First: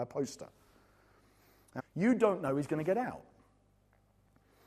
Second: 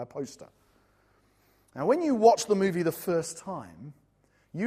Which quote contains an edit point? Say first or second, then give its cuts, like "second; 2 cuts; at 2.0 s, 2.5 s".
first; 1 cut; at 1.8 s